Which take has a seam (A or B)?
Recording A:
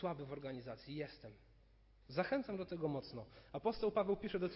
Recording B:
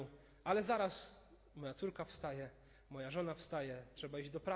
A